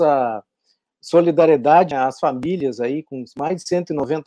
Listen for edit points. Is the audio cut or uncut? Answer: cut